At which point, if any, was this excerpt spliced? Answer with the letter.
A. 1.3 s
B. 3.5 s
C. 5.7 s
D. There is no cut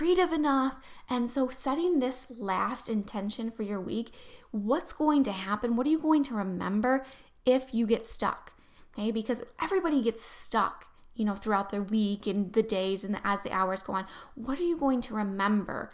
D